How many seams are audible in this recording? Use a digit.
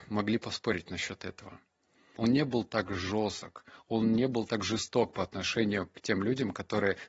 1